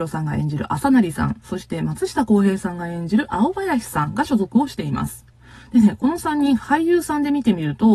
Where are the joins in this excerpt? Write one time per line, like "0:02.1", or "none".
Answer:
none